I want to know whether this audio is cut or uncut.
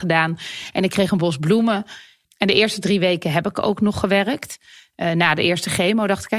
cut